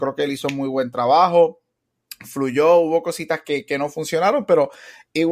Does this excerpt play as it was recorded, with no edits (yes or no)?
yes